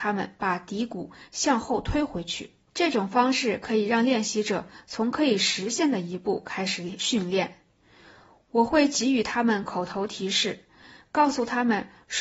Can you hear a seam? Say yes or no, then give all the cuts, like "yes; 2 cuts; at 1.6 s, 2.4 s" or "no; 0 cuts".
yes; 1 cut; at 2.7 s